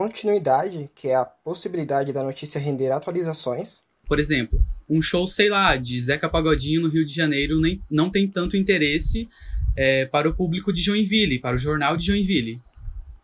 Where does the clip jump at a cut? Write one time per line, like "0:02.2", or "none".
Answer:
0:04.0